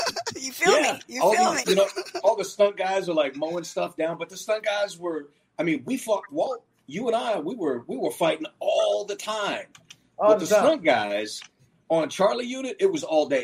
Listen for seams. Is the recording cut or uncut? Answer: cut